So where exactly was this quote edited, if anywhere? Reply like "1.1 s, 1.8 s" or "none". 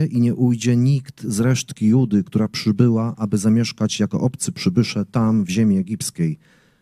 none